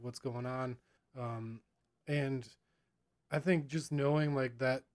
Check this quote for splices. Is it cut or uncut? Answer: cut